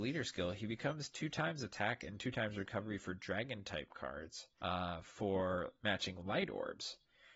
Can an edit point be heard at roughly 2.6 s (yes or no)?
no